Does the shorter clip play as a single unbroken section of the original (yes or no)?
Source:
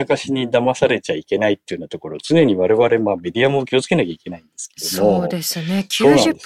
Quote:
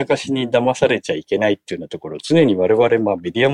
yes